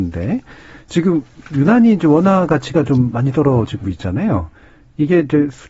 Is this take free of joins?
yes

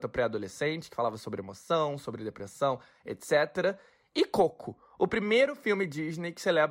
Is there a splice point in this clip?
no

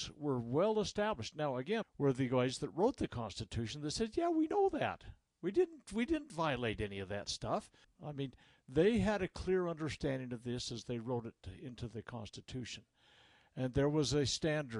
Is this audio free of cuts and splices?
no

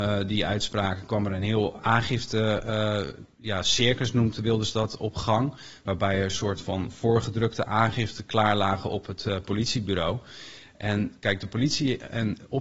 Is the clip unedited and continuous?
yes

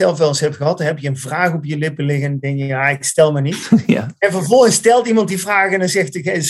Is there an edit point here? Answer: no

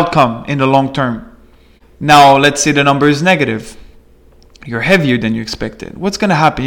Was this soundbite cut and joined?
no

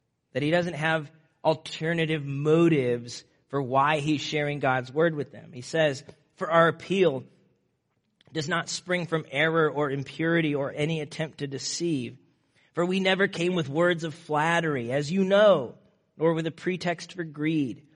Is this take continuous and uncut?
yes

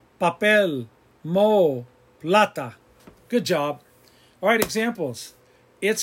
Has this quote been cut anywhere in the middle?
no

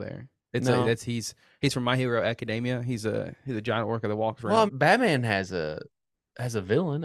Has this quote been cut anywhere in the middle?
yes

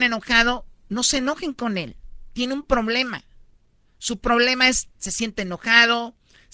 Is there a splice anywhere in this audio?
no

